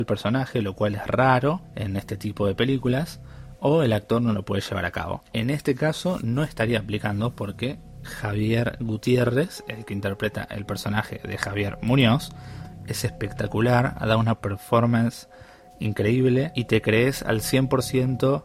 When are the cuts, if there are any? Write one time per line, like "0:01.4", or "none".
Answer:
none